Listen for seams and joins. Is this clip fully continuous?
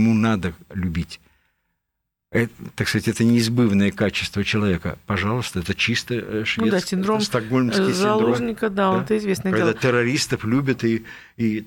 yes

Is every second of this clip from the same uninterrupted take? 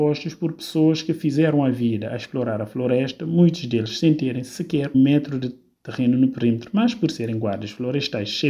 no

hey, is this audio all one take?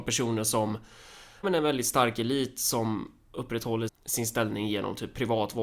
no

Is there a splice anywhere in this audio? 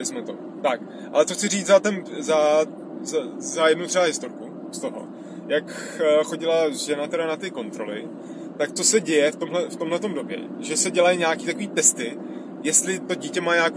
no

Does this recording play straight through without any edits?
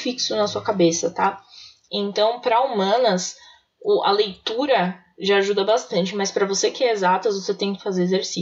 no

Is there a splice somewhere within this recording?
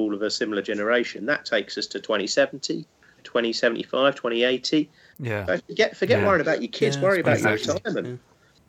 yes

